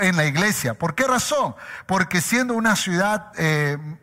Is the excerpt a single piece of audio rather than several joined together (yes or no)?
yes